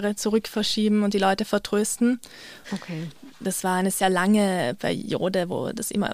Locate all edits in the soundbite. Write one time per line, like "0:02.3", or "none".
0:02.6